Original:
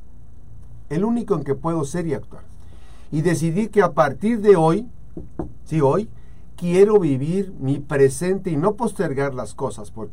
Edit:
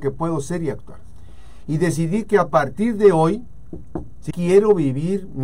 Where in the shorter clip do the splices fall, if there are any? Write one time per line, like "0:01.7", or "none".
0:04.3

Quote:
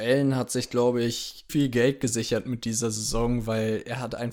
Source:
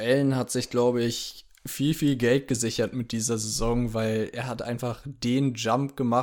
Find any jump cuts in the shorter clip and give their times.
0:01.5

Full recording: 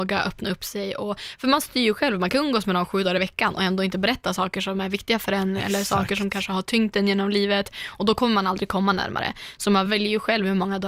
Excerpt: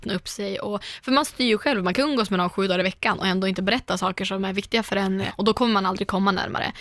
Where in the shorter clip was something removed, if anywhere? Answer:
0:05.3

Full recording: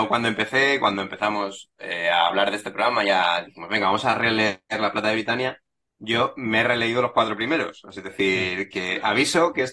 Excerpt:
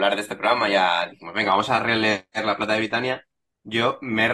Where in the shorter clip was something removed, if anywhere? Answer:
none

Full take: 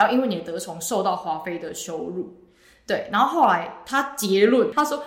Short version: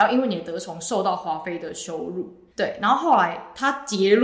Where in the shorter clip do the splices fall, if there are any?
0:02.5

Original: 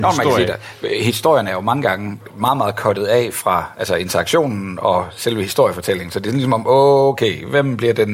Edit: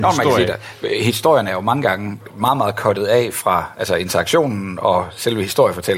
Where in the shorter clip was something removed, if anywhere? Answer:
none

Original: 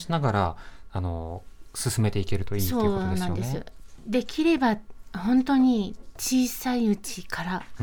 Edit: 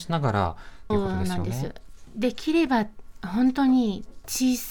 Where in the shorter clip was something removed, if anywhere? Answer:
0:00.9

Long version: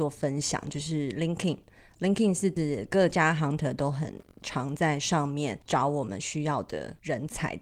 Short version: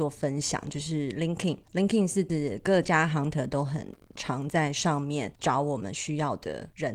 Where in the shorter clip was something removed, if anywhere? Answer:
0:01.6

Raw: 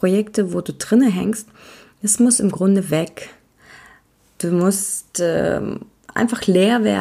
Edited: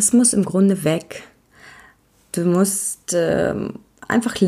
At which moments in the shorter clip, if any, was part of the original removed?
none

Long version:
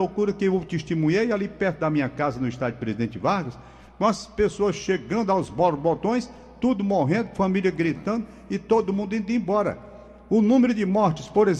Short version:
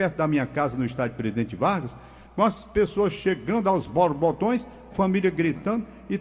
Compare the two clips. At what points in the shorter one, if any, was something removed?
0:04.9

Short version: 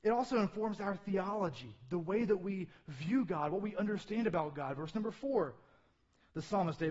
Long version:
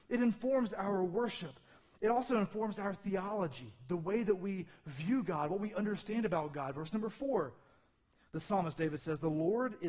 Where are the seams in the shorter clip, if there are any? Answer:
none

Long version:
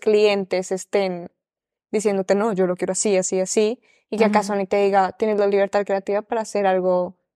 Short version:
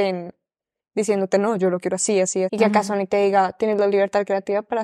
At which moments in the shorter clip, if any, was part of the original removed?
0:02.5

